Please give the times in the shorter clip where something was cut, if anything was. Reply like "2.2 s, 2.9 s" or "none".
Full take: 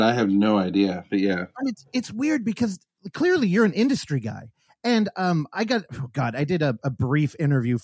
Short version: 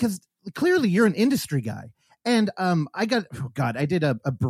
none

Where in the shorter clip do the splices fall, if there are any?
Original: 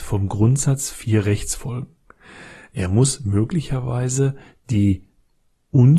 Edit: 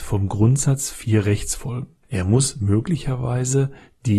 2.0 s

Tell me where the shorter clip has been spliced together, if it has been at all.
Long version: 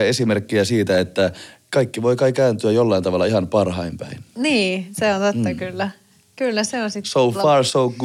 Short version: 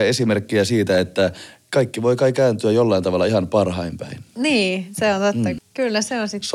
5.6 s

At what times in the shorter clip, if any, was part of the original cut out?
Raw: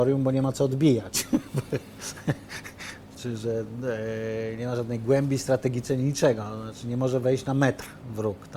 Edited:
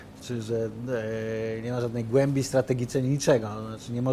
none

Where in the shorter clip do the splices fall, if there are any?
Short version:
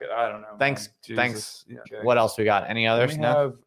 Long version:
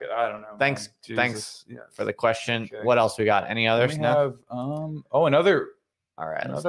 1.8 s

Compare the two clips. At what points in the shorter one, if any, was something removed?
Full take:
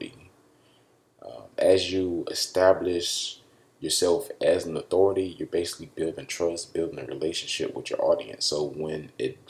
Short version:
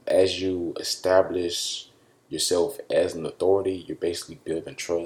none

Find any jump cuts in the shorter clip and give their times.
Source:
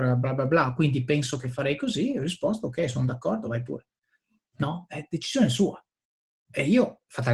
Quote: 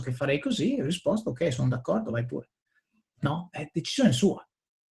none

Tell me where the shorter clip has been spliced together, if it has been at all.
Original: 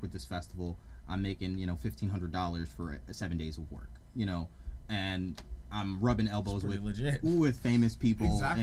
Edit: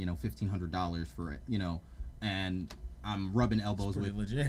1.4 s

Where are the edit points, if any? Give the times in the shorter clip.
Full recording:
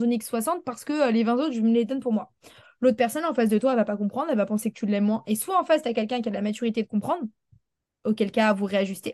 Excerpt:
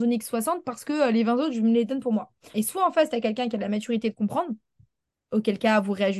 2.5 s

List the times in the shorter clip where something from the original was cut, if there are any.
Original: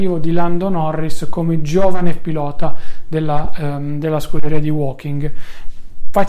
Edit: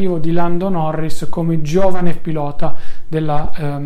none

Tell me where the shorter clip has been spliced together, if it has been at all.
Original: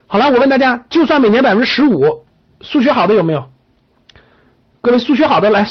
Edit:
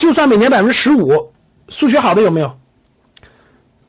none

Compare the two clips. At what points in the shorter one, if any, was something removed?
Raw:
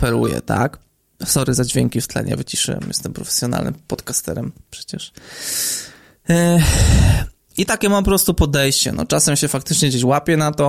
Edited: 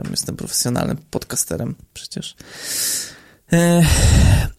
none

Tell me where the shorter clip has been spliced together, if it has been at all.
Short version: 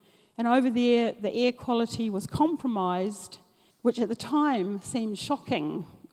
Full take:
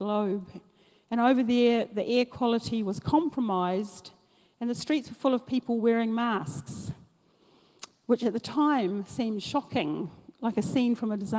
3.7 s

